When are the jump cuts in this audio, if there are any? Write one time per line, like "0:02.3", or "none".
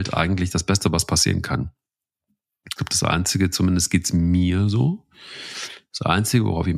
0:02.8